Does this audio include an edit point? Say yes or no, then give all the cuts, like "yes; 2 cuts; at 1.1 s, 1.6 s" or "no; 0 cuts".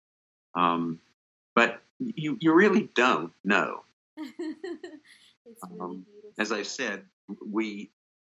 yes; 2 cuts; at 4.1 s, 6.3 s